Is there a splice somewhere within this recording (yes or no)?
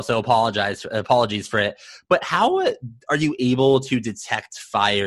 no